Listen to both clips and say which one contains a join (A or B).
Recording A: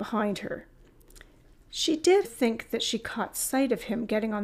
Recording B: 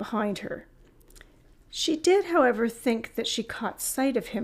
A